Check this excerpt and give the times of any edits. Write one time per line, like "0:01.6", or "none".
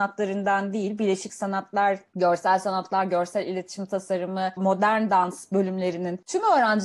0:04.6